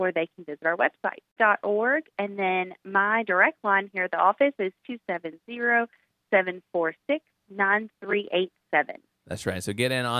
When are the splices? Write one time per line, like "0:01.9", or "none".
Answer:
0:01.4